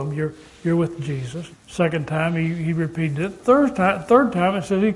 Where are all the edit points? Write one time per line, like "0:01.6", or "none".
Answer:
0:01.5